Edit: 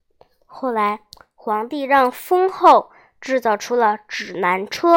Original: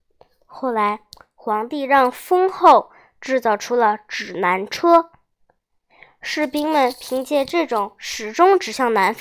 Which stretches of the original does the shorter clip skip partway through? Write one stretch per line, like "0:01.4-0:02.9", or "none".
none